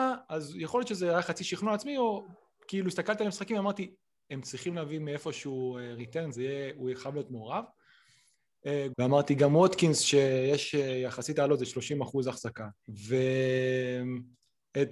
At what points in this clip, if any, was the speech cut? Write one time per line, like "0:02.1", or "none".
0:08.9
0:12.8

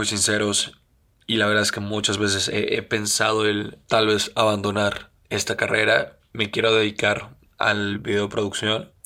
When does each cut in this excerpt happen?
none

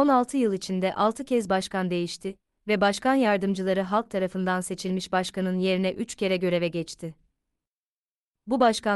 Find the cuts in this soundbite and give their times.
none

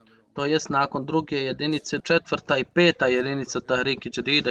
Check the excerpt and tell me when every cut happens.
0:02.0

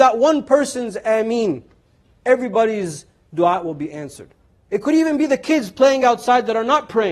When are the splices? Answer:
none

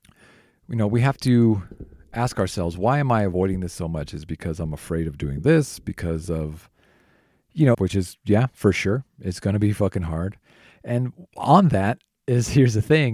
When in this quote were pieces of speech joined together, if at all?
0:07.7

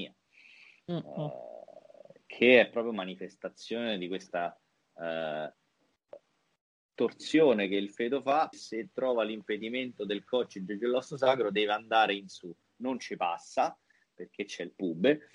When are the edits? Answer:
0:08.5

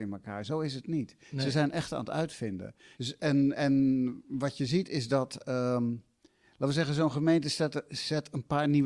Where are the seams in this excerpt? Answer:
0:02.9

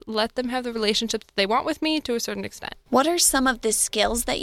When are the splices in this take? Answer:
0:02.8

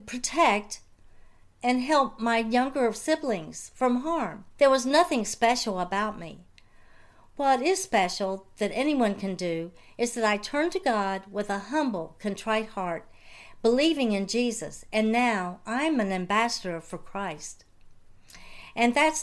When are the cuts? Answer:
0:04.5

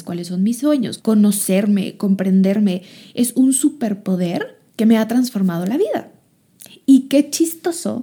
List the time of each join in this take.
0:01.0
0:04.7

